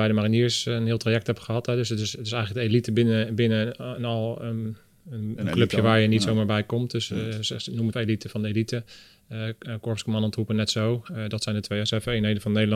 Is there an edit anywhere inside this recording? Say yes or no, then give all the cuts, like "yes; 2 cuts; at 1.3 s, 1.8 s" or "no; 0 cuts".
yes; 1 cut; at 7.9 s